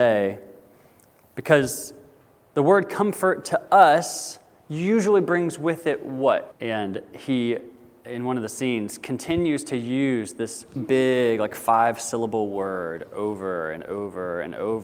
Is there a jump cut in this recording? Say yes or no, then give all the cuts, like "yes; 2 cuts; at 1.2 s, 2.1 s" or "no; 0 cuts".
yes; 2 cuts; at 6.5 s, 10.8 s